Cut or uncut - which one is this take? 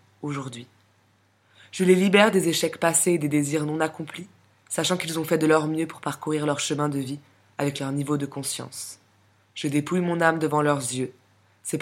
uncut